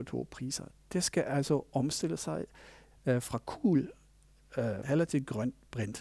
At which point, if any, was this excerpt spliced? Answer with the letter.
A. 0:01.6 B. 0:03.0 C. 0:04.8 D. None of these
C